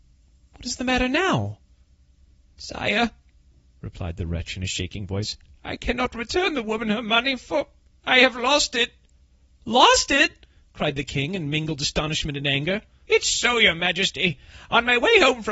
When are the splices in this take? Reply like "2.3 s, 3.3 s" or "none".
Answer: none